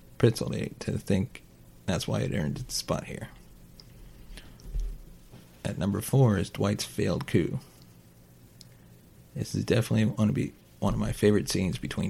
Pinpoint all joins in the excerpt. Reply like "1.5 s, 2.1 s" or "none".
none

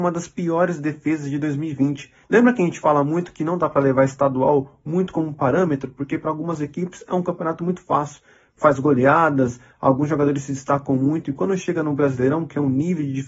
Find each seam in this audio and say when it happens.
2.2 s

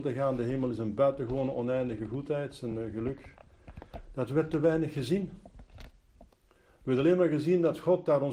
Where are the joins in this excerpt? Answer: none

